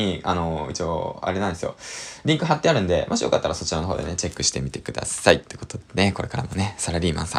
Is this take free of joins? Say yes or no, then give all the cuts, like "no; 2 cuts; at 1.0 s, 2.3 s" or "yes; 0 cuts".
yes; 0 cuts